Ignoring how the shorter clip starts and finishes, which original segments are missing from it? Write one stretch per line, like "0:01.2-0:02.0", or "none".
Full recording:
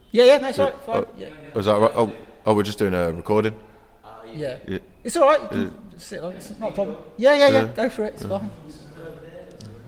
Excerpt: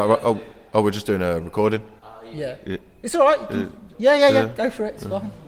0:03.7-0:04.0
0:05.9-0:07.1

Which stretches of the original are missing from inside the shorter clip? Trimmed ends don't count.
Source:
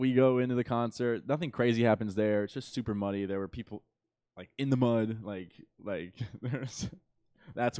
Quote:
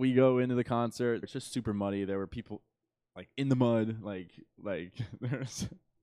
0:01.2-0:02.4

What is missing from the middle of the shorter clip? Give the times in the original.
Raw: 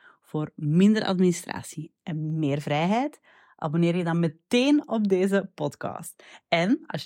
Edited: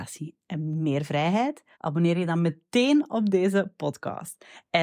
0:03.3-0:03.5

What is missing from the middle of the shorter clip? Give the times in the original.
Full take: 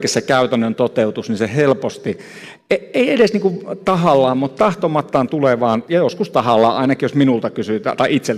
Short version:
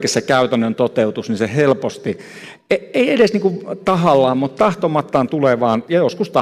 none

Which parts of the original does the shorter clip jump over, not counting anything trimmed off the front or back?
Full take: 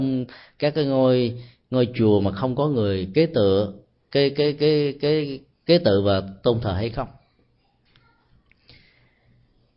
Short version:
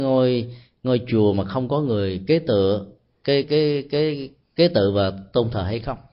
0:04.3-0:04.5

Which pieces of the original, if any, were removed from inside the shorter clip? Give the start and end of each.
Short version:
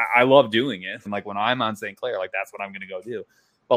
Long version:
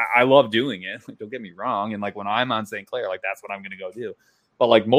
0:01.1-0:02.0

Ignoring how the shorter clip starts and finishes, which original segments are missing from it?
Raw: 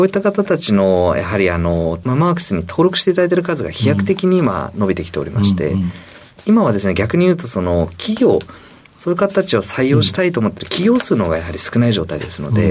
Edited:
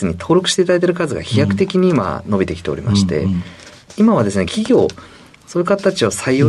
0:06.9-0:08.0

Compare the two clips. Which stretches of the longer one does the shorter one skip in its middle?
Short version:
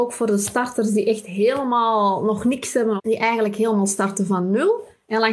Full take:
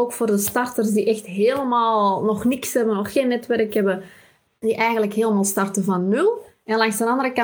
0:03.0-0:04.5

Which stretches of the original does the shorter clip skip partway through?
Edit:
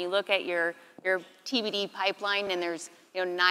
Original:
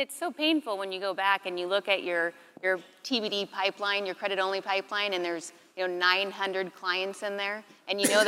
0:04.1-0:05.1

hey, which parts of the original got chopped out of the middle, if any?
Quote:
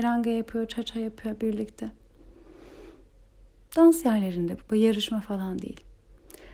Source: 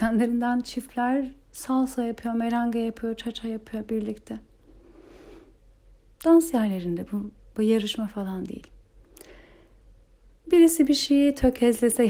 0:07.1-0:07.5

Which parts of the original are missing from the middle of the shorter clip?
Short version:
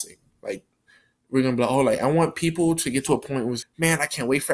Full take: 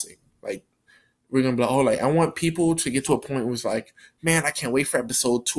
0:03.6-0:04.1

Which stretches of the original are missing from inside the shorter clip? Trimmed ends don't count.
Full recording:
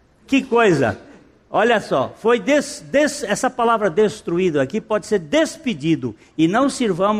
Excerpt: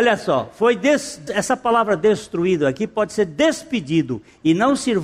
0:02.9-0:03.2

